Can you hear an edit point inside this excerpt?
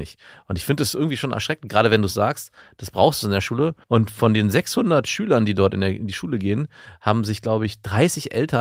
yes; 1 cut; at 3.8 s

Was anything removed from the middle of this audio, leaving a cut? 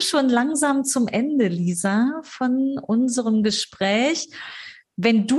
no; 0 cuts

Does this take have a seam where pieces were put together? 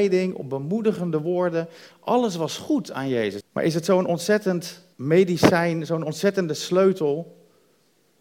yes; 3 cuts; at 1.9 s, 3.4 s, 4.9 s

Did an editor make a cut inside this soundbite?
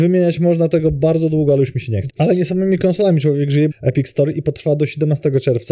yes; 2 cuts; at 2.1 s, 3.7 s

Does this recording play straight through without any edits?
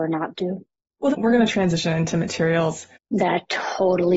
no; 2 cuts; at 1.1 s, 3.1 s

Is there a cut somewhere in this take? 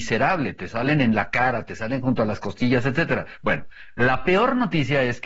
no; 0 cuts

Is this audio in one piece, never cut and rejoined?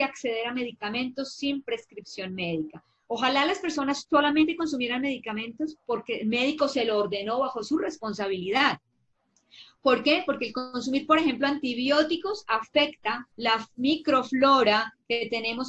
no; 1 cut; at 13.3 s

